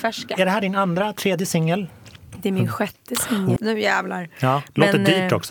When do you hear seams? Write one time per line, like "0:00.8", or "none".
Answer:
0:03.6